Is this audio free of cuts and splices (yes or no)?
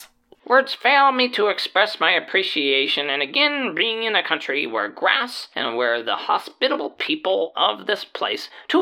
yes